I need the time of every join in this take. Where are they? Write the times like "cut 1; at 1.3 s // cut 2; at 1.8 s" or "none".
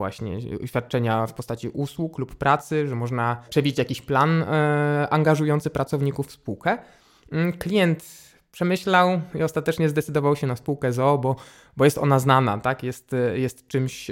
none